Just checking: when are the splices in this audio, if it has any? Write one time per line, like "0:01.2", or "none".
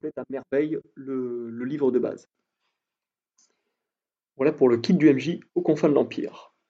0:05.5